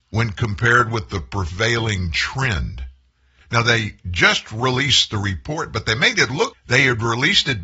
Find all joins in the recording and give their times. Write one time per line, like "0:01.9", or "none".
0:03.4
0:06.5